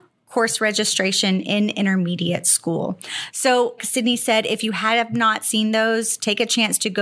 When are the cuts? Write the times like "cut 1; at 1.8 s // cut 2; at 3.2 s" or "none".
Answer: cut 1; at 3.8 s